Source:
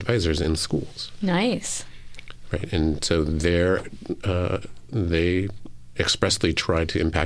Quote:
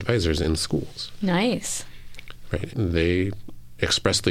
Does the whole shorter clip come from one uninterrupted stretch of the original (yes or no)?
no